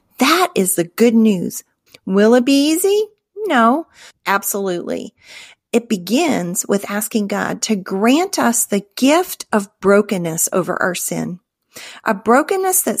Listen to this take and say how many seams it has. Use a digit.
2